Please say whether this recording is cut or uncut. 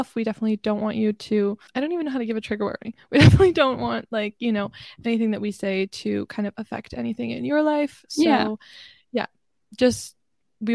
cut